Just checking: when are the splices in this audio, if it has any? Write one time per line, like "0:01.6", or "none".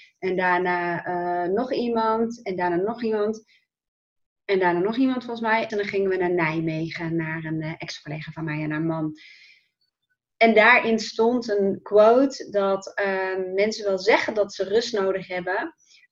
0:05.7
0:10.3